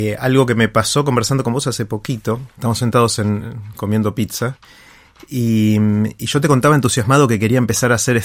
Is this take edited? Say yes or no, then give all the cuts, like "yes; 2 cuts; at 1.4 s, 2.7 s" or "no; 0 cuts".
no; 0 cuts